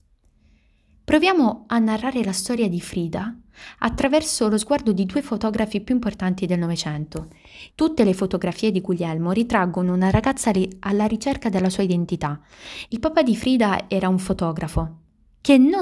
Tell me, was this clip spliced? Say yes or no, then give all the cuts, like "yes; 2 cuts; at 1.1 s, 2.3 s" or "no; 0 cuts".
yes; 2 cuts; at 7.7 s, 12.9 s